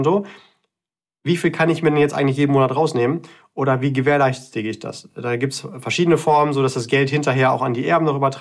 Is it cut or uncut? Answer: uncut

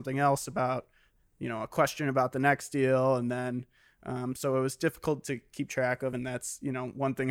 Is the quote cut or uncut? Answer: uncut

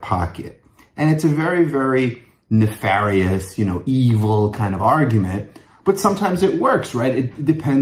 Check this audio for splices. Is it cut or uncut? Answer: uncut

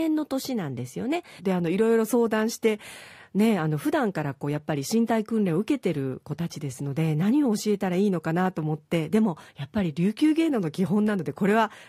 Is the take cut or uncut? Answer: cut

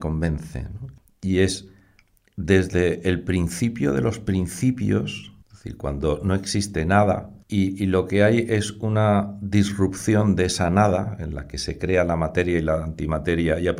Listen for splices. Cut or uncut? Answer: cut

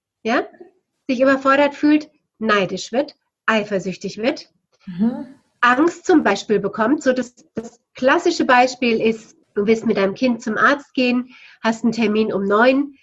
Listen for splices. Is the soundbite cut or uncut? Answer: cut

